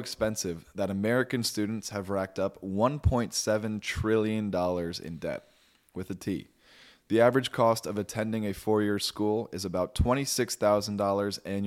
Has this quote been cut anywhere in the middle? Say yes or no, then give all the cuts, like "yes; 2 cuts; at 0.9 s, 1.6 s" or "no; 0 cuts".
no; 0 cuts